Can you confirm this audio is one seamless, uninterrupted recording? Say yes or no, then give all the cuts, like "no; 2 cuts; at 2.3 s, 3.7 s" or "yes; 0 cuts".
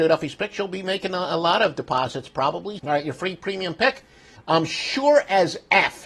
no; 2 cuts; at 2.8 s, 4.4 s